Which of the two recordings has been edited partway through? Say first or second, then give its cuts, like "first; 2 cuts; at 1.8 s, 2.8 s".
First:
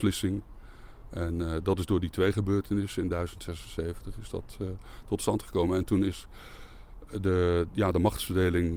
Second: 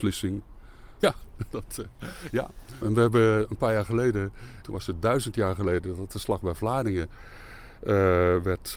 second; 3 cuts; at 1.0 s, 2.8 s, 4.6 s